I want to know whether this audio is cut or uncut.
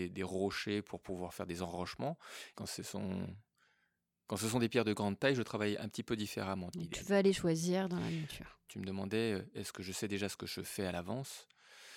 cut